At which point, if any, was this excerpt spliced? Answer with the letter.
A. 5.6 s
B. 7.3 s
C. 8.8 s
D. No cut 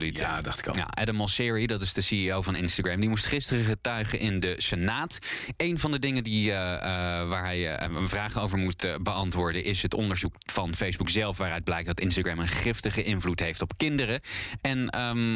D